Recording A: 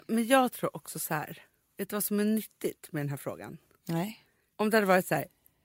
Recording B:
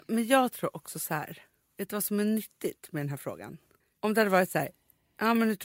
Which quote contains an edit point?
B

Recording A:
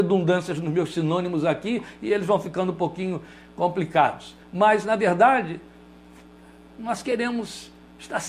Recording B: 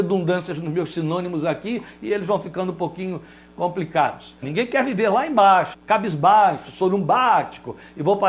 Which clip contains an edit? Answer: B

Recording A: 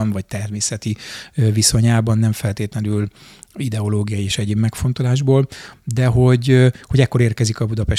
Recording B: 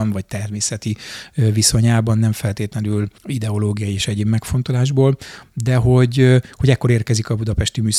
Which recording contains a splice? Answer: B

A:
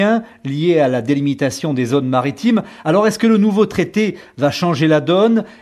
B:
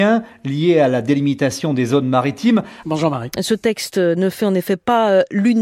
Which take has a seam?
B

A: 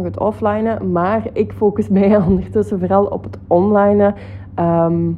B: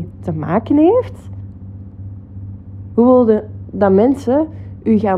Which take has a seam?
B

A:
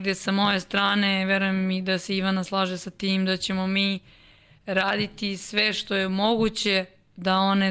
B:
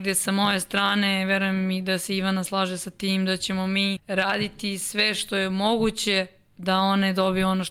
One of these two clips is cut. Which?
B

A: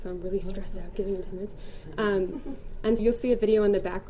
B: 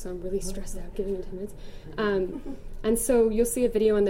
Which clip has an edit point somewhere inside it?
A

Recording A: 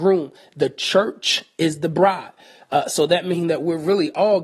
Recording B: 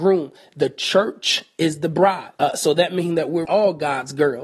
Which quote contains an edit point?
B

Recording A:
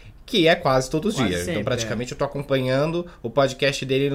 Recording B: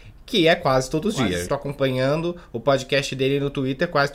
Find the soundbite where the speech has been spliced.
B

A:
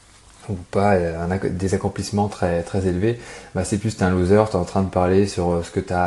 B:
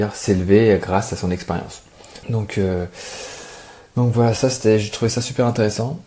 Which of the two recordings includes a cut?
B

